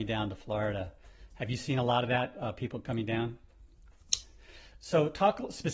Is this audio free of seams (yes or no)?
no